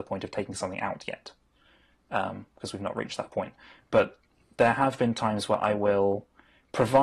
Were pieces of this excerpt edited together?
no; 0 cuts

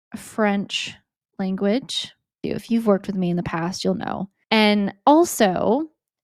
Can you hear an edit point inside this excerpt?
yes; 2 cuts; at 2.4 s, 4.4 s

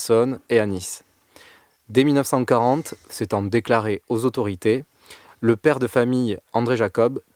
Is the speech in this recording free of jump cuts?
yes; 0 cuts

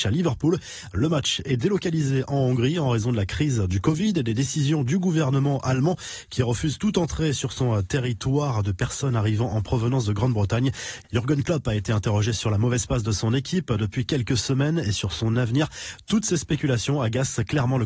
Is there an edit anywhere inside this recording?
no; 0 cuts

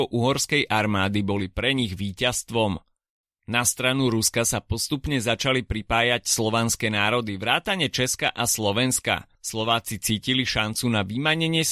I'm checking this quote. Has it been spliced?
yes; 2 cuts; at 3.2 s, 9.3 s

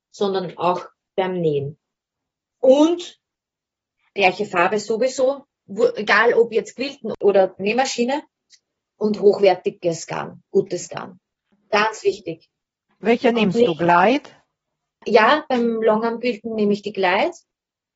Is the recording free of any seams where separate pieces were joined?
yes; 0 cuts

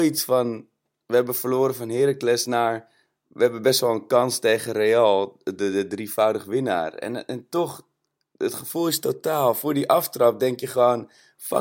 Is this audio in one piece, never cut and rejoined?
yes; 0 cuts

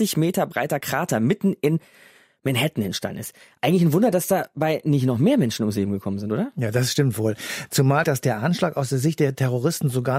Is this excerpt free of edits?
no; 1 cut; at 8.0 s

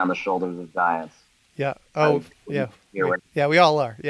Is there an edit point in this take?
yes; 1 cut; at 3.2 s

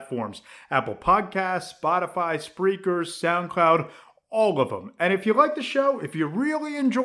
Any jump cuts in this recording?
no; 0 cuts

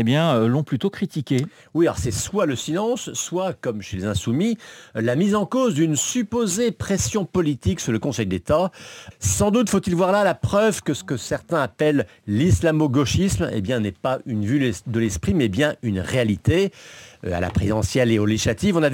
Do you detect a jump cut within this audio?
yes; 1 cut; at 9.1 s

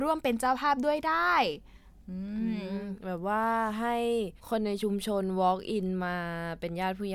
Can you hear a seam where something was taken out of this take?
yes; 1 cut; at 4.4 s

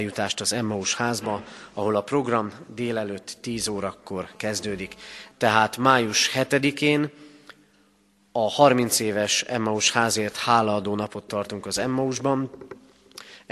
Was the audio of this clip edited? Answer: yes; 1 cut; at 5.3 s

